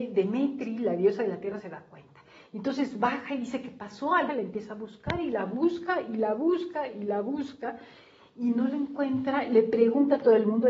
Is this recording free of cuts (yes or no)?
no